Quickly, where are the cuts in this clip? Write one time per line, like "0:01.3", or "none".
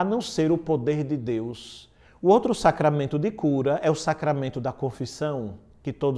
0:02.0